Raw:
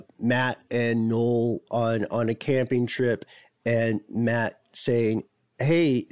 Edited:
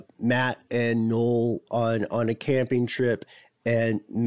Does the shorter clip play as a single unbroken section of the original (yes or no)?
yes